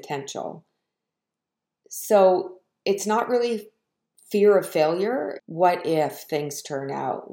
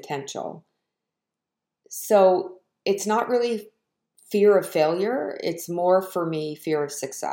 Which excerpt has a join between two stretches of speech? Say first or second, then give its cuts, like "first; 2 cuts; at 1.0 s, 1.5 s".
first; 1 cut; at 5.4 s